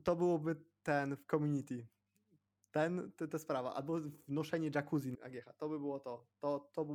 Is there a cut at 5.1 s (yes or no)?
yes